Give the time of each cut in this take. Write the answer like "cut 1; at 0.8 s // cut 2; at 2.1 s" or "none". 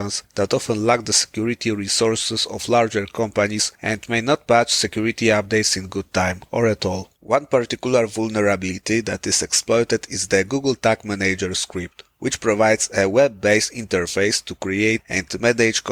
cut 1; at 7.1 s